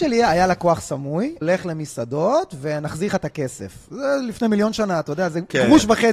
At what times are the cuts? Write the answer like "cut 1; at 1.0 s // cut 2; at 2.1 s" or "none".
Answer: cut 1; at 1.4 s